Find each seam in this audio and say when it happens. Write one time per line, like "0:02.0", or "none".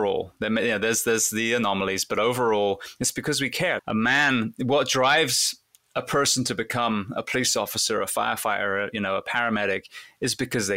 0:03.8